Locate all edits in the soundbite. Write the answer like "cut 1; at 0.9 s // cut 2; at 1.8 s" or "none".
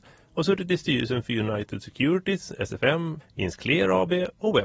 cut 1; at 3.2 s